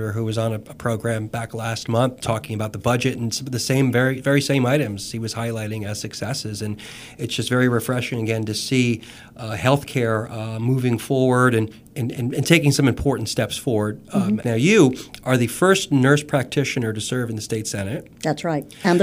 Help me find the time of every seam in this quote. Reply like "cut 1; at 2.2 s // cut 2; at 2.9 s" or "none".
cut 1; at 14.4 s